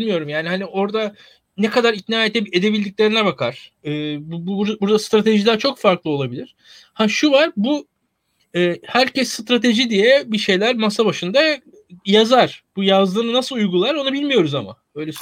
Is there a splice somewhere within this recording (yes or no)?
no